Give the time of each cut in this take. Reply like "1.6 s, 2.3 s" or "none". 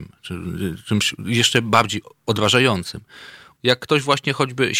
3.6 s